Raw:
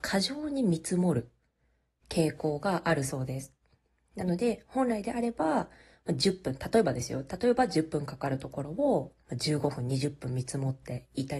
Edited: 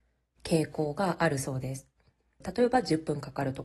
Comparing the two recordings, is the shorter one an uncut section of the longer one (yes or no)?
no